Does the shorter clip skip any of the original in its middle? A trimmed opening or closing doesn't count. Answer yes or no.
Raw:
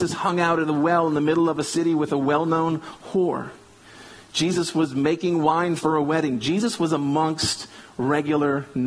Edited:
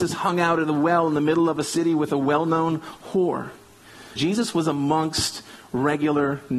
yes